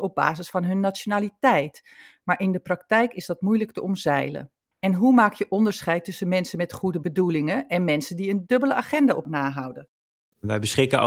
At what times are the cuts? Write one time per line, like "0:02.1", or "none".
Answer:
0:04.7